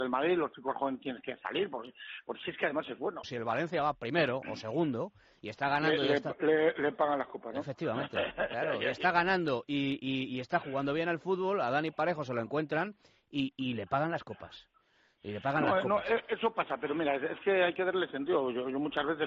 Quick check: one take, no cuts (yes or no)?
no